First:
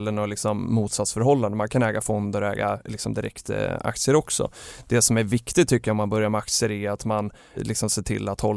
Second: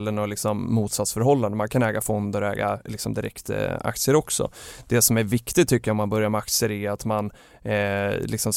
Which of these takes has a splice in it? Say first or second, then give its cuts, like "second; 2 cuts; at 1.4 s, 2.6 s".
first; 1 cut; at 7.6 s